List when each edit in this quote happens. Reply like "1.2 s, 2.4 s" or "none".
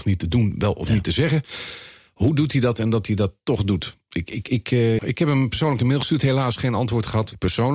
5.0 s

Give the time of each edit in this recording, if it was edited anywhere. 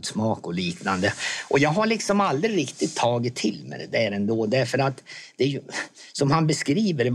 none

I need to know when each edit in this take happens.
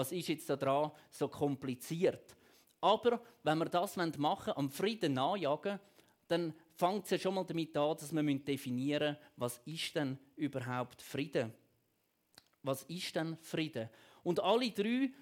none

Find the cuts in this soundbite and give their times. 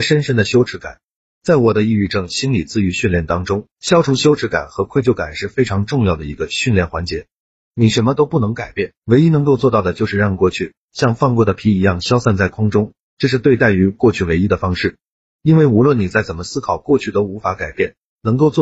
1.3 s, 7.5 s

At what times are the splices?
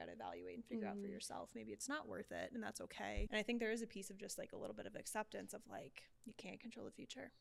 3.3 s, 6.1 s

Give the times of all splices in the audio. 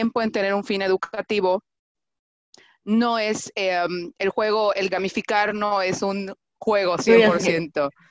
4.9 s

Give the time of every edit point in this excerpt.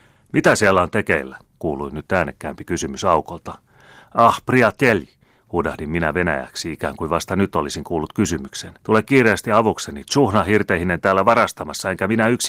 8.8 s

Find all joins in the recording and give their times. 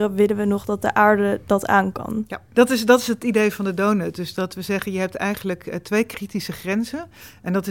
none

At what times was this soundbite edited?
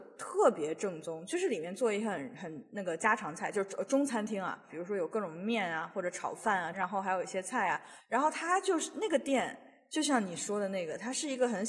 4.7 s, 6.7 s, 8.0 s

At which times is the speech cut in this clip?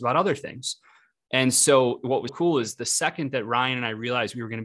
2.3 s

